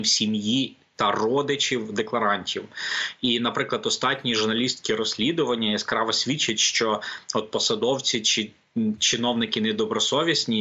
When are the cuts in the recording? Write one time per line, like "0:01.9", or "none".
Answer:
none